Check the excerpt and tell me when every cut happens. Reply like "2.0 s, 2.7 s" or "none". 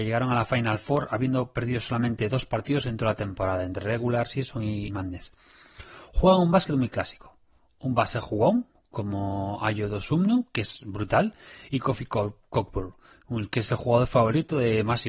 4.9 s

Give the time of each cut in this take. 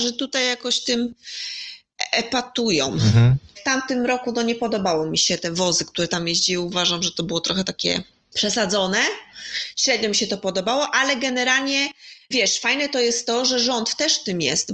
3.6 s

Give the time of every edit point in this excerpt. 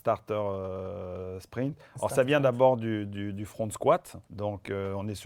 4.2 s

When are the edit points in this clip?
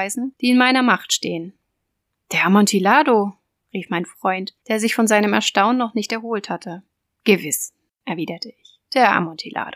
none

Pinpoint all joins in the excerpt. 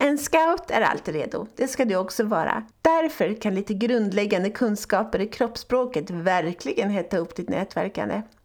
2.7 s

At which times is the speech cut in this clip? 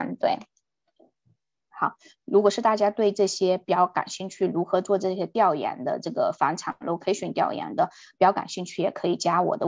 1.7 s

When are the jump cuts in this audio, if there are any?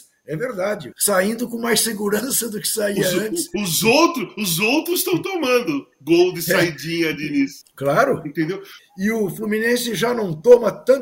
0.9 s, 7.6 s, 8.8 s

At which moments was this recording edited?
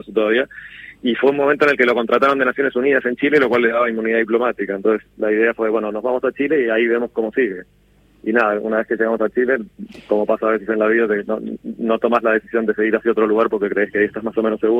none

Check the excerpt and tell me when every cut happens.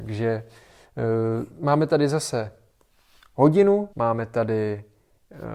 3.9 s

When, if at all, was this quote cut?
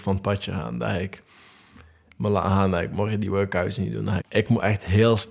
4.2 s

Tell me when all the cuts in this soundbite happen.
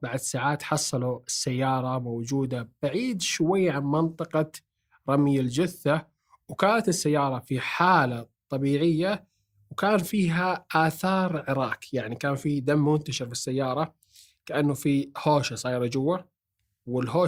none

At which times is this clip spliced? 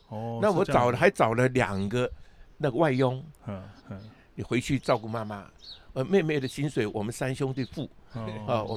3.8 s

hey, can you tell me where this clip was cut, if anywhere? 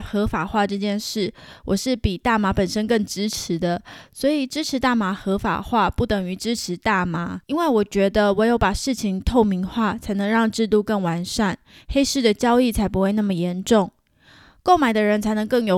7.4 s

